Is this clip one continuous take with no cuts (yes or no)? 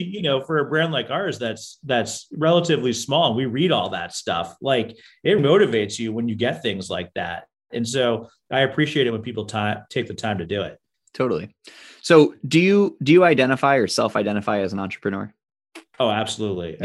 no